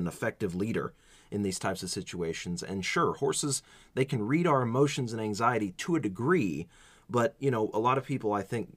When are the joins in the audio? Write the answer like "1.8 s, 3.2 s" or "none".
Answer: none